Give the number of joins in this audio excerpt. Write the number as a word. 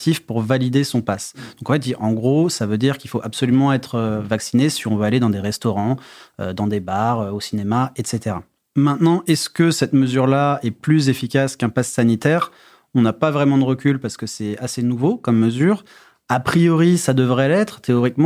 zero